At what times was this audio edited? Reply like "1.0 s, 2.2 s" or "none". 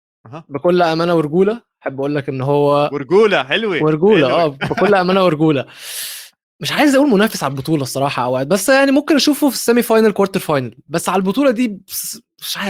none